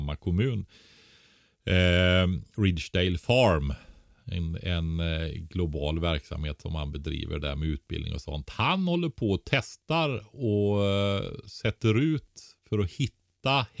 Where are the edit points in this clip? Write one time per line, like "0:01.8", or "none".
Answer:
none